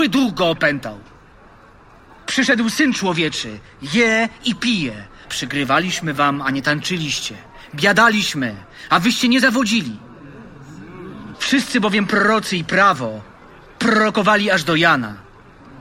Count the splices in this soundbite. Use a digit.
2